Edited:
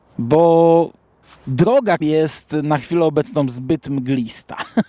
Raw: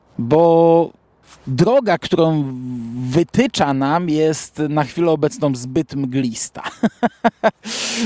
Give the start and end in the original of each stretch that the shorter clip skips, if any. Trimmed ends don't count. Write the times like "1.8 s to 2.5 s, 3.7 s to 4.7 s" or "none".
2.0 s to 4.1 s